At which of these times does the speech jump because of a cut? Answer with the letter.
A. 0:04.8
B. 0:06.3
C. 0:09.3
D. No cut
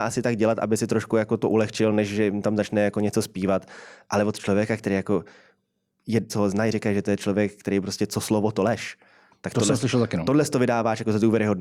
B